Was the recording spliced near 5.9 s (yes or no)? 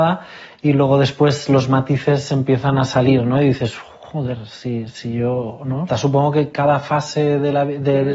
yes